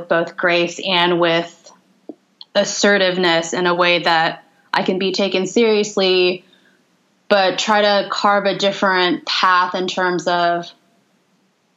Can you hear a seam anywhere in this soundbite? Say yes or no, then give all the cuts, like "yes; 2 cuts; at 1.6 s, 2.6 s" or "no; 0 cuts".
yes; 1 cut; at 2.5 s